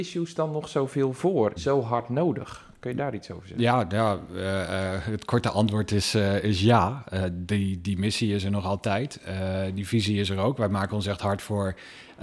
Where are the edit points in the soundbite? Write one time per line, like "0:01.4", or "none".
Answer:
0:01.6